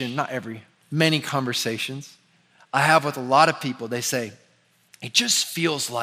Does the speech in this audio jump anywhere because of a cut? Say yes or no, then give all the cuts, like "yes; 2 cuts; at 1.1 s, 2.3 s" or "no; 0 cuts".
no; 0 cuts